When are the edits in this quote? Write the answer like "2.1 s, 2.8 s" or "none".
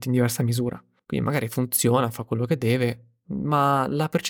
1.0 s